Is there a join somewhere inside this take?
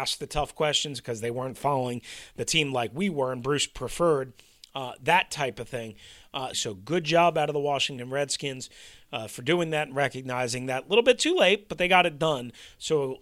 yes; 1 cut; at 6.5 s

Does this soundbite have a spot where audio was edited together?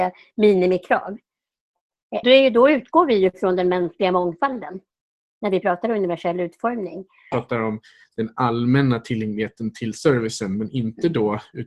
yes; 2 cuts; at 2.2 s, 7.3 s

